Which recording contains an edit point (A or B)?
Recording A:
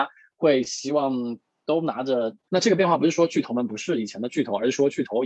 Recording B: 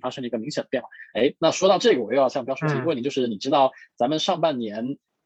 A